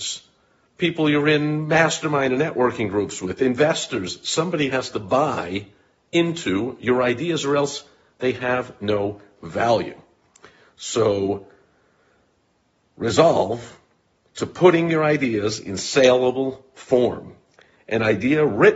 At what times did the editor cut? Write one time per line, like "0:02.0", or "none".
none